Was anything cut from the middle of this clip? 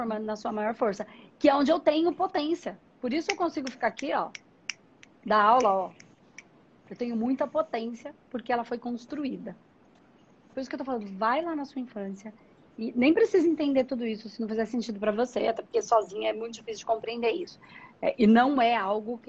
yes; 1 cut; at 10.5 s

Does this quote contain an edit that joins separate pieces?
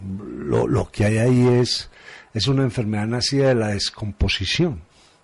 no; 0 cuts

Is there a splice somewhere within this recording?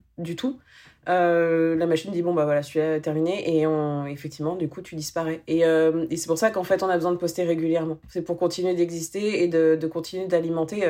no; 0 cuts

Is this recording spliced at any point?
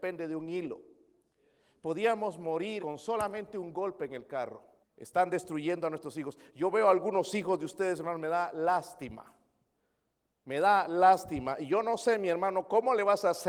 yes; 2 cuts; at 2.8 s, 4.8 s

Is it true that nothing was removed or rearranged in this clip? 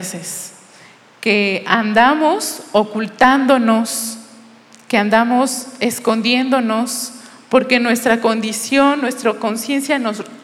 yes; 0 cuts

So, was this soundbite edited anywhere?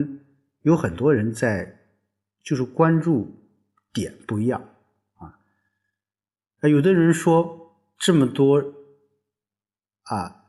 no; 0 cuts

